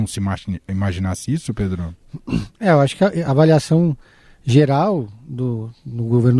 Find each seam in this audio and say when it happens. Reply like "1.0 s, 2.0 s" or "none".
none